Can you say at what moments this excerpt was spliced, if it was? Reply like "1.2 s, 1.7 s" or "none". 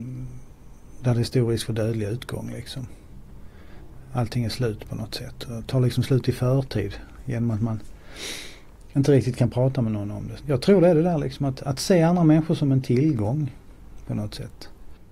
10.4 s